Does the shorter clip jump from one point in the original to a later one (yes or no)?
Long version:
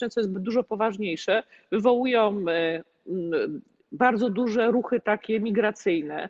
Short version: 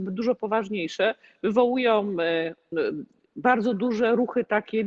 yes